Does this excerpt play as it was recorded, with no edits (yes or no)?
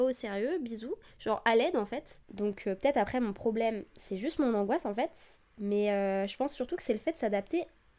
no